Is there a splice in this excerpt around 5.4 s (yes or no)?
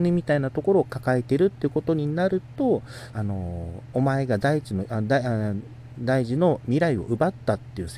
no